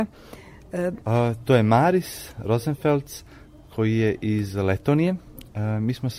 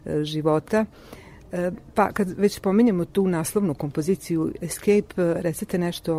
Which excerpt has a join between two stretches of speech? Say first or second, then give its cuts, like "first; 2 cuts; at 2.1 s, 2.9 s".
first; 1 cut; at 1.0 s